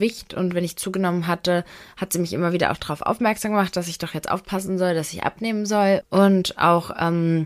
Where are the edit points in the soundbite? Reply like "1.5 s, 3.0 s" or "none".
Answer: 6.0 s